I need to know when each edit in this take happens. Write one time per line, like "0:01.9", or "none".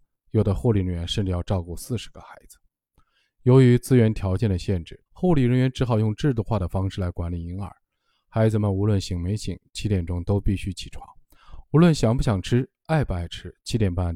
0:05.1

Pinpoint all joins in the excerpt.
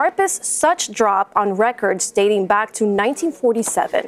none

